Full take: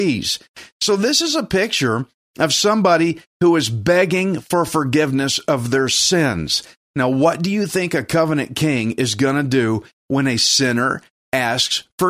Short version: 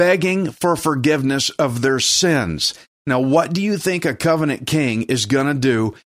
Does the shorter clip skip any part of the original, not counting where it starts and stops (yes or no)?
no